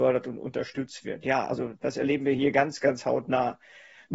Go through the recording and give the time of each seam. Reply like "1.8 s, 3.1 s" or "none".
none